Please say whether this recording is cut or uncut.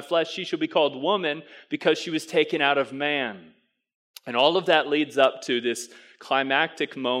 uncut